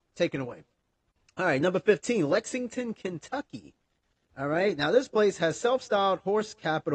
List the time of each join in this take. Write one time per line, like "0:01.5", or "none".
none